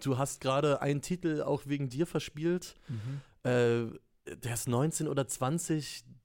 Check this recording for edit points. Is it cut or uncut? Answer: uncut